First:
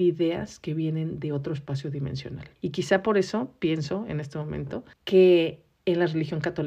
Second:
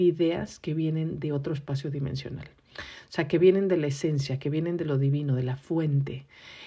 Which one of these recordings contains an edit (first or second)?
first